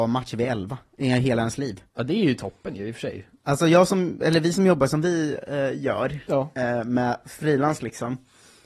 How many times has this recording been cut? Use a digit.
0